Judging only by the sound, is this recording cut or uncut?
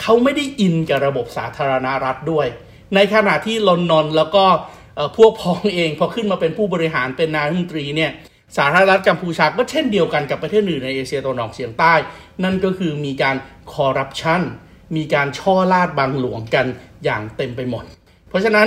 uncut